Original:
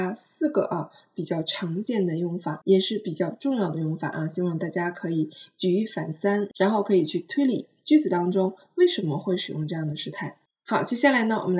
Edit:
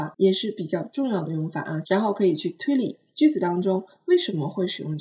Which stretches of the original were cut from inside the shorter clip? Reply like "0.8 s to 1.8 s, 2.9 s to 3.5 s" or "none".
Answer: 4.3 s to 6.5 s

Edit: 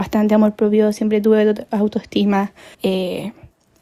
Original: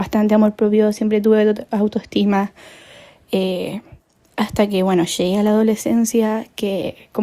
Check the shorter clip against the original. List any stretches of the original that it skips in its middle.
2.7 s to 3.2 s

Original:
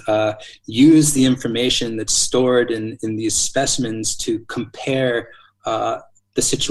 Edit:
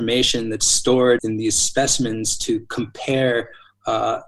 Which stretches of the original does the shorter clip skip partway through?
2.7 s to 3.0 s

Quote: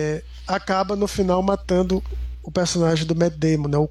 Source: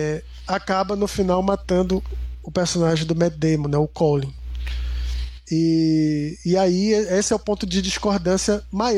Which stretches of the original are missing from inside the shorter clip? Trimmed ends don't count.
none

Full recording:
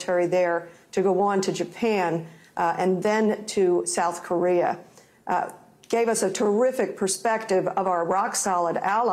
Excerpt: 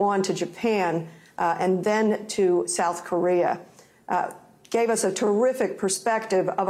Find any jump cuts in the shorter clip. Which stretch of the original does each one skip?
none

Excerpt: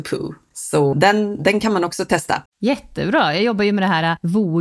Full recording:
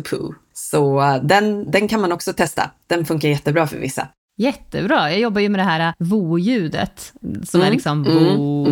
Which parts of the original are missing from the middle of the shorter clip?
0.9 s to 1.2 s, 2.7 s to 4.2 s

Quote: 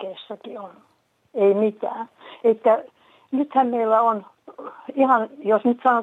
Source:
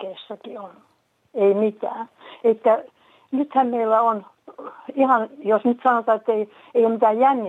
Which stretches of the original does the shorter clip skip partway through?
none

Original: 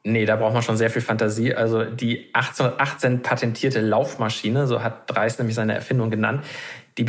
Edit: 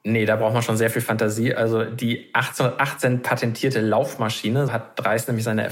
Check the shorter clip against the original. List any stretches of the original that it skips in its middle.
4.7 s to 4.8 s

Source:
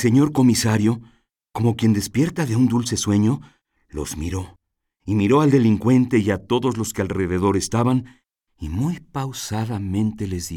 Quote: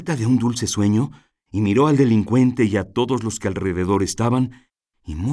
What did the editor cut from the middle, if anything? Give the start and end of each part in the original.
3.6 s to 4.9 s

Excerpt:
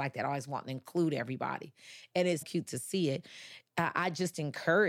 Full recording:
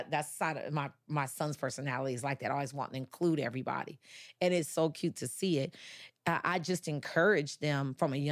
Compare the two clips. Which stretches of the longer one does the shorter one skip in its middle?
4.7 s to 4.9 s

